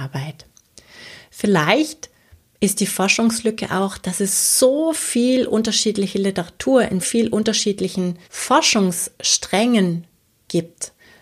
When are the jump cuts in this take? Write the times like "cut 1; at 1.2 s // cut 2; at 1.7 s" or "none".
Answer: cut 1; at 7.0 s // cut 2; at 8.2 s